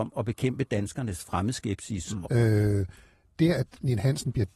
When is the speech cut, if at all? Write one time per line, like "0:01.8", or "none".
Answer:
0:02.2